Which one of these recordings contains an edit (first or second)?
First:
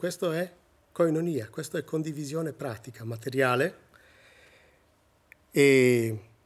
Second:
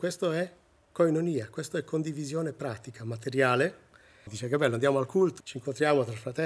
second